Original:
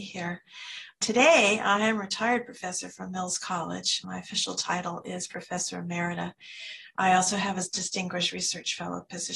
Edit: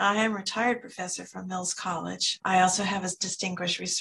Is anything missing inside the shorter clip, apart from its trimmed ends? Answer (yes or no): yes